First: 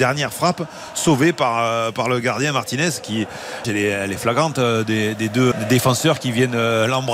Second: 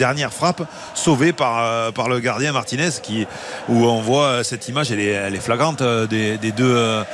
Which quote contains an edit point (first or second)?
first